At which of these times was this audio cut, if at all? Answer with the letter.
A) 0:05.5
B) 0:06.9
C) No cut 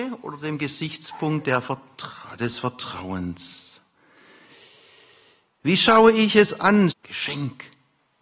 B